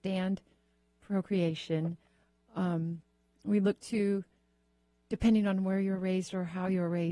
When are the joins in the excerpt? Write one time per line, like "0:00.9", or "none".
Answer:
none